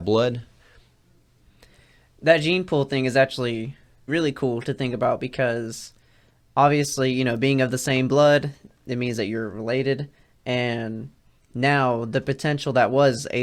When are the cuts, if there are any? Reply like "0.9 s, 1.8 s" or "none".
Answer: 4.1 s

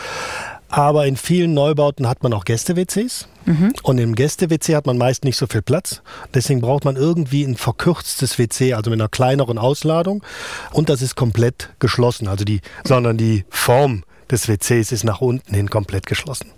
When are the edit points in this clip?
10.7 s, 12.8 s

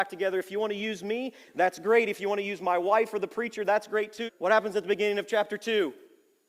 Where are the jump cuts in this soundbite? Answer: 4.3 s

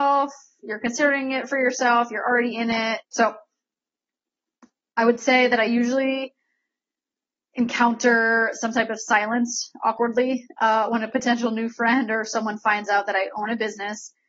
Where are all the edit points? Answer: 3.0 s

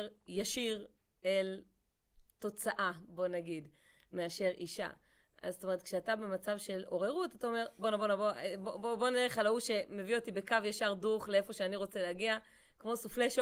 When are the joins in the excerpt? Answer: none

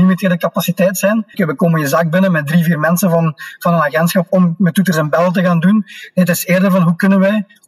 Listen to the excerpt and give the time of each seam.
1.3 s

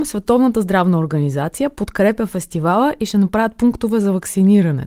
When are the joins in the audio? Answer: none

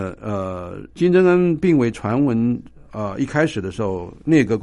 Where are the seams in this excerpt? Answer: 0.9 s

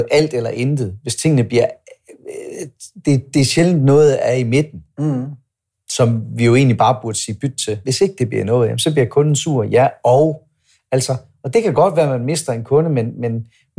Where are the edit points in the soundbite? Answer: 7.8 s

